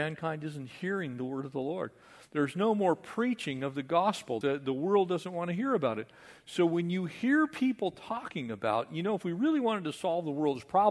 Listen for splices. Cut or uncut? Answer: cut